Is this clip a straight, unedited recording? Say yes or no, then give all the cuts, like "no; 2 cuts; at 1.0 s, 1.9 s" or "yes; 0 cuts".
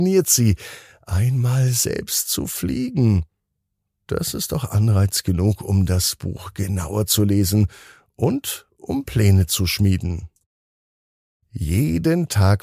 yes; 0 cuts